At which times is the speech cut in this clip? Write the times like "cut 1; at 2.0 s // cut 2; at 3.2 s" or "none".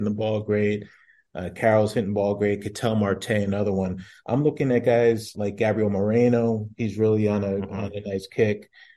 cut 1; at 5.3 s